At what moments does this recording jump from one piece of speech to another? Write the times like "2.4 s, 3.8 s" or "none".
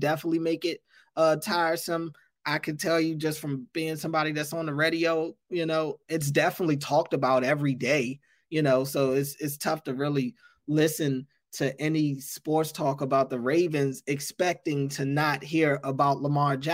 6.1 s

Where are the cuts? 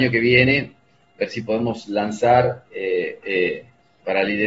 3.2 s

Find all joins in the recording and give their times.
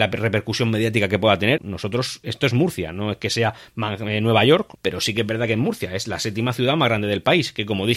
1.6 s, 4.8 s

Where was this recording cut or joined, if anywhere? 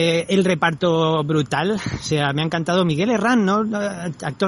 none

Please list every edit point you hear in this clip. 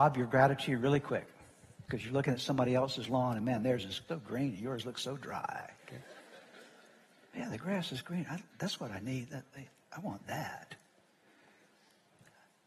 4.1 s, 5.8 s

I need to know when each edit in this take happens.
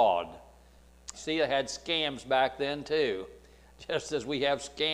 1.1 s

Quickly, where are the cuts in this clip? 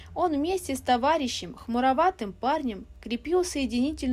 none

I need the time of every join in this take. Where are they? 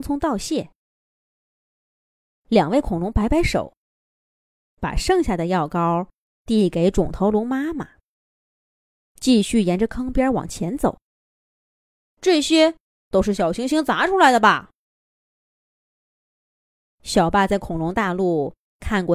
none

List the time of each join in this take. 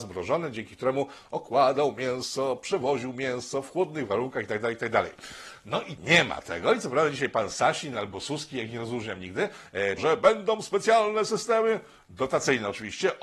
10.0 s

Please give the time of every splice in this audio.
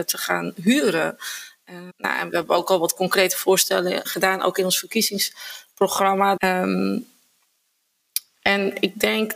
1.9 s, 4.0 s, 6.4 s

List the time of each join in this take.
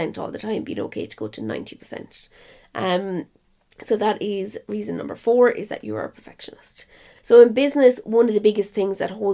7.2 s

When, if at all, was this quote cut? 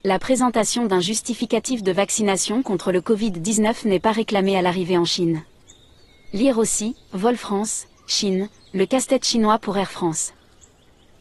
none

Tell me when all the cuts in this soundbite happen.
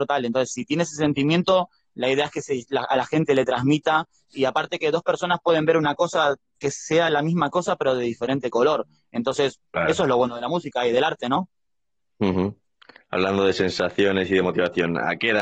none

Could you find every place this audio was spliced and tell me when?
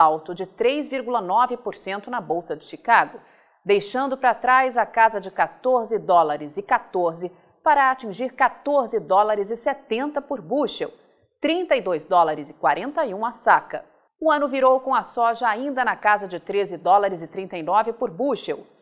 14.1 s

